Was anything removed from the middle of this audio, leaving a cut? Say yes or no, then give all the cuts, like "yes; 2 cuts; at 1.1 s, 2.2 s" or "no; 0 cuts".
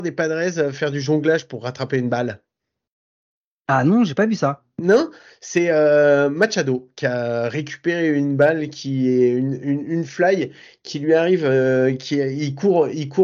no; 0 cuts